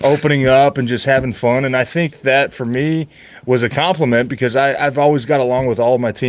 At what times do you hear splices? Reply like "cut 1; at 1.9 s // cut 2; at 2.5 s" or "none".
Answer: none